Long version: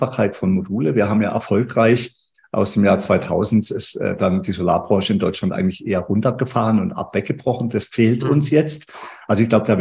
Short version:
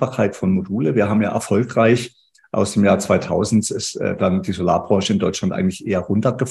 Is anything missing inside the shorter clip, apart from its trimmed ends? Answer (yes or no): no